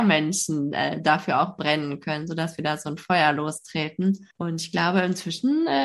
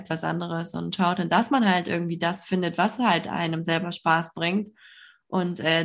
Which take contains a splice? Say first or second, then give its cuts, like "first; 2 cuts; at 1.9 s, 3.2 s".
first; 1 cut; at 4.3 s